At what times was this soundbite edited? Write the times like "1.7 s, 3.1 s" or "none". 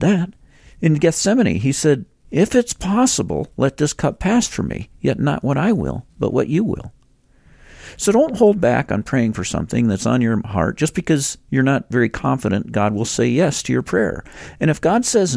none